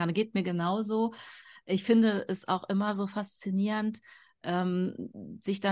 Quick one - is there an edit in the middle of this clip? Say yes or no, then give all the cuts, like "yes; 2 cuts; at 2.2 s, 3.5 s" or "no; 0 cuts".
no; 0 cuts